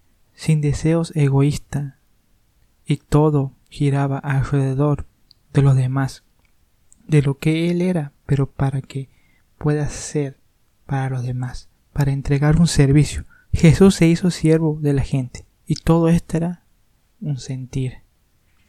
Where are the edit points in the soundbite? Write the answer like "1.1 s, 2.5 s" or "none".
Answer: 13.4 s, 15.5 s

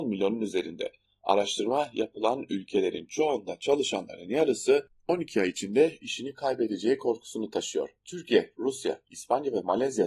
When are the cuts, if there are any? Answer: 1.1 s

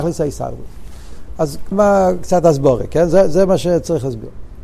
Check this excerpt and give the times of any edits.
1.7 s

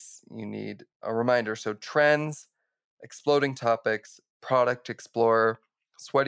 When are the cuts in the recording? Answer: none

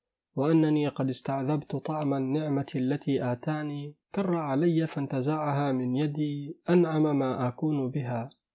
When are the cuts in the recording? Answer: 4.0 s

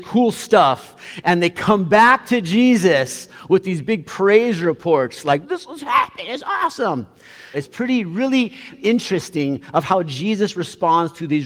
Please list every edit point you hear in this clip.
5.4 s, 7.5 s, 8.7 s

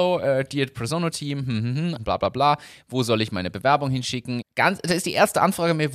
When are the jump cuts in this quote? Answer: 2.0 s, 4.4 s

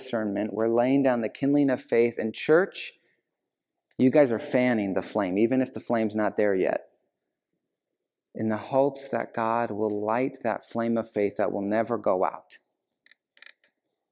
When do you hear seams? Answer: none

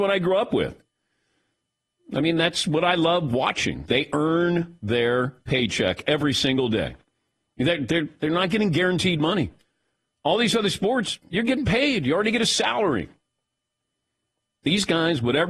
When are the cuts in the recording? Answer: none

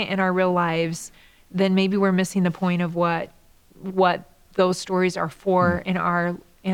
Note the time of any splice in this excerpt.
none

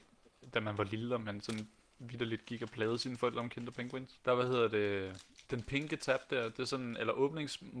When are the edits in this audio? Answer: 4.2 s, 5.4 s

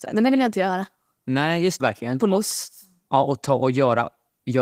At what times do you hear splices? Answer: 1.8 s

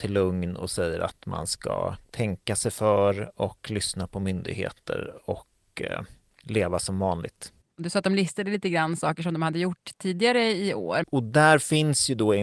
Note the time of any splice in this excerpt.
7.7 s, 11.0 s

